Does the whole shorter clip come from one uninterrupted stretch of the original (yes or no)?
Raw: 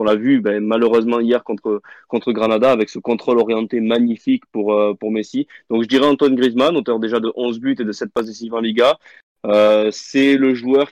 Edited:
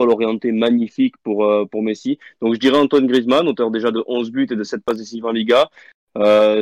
yes